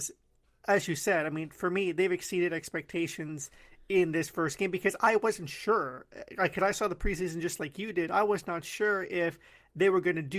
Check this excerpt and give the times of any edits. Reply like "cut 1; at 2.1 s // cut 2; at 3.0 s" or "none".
none